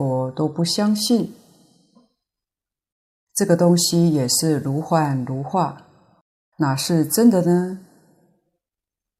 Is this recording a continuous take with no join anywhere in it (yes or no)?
yes